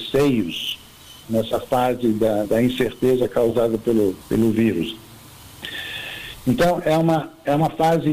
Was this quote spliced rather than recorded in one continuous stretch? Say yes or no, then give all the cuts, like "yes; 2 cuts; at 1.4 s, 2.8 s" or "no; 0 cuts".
yes; 3 cuts; at 1.2 s, 2.4 s, 4.2 s